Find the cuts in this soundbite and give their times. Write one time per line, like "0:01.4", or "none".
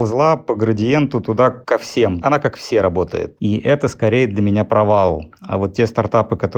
0:03.4